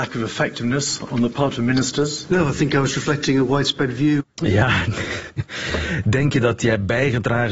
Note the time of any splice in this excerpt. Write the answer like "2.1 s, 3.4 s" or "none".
none